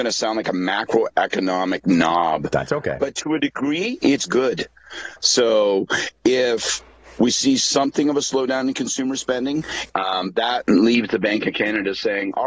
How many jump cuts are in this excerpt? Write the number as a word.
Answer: two